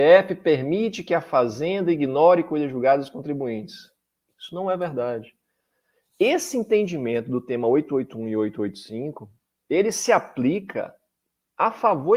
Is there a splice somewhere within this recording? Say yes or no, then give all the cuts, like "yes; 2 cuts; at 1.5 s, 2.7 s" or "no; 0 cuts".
no; 0 cuts